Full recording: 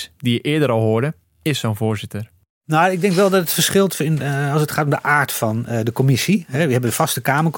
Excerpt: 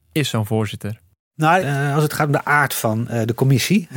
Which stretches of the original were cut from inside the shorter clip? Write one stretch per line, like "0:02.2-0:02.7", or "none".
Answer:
0:02.9-0:04.2